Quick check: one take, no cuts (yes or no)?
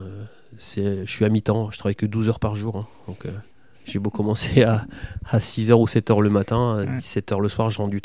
yes